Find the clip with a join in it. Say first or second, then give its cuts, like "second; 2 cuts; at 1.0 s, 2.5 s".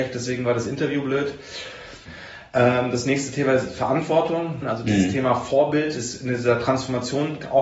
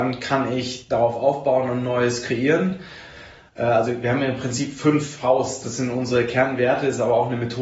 first; 2 cuts; at 2.1 s, 4.6 s